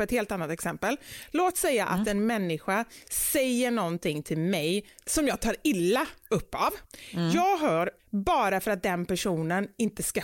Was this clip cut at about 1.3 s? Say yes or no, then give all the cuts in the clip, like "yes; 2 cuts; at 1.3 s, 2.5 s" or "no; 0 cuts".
no; 1 cut; at 8.0 s